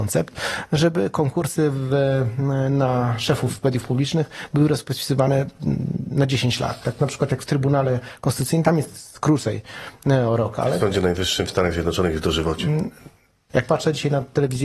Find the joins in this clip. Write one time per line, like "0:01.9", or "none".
0:13.5